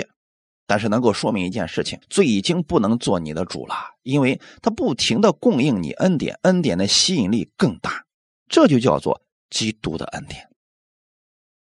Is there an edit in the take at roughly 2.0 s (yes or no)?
yes